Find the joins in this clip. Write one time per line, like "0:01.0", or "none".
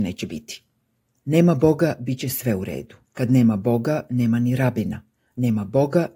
0:03.0